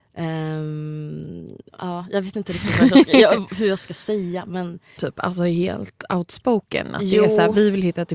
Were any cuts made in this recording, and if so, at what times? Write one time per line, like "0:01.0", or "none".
0:01.7
0:05.0